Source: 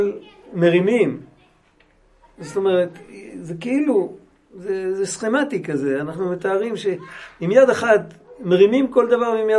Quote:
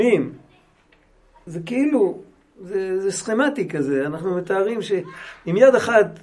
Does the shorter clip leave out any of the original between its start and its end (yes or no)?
yes